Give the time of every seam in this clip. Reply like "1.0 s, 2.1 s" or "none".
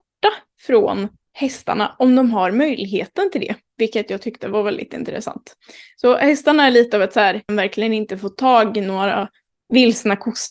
7.5 s